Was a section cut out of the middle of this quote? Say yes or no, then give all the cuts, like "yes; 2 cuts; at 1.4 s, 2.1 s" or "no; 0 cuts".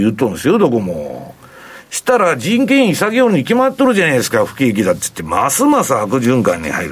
no; 0 cuts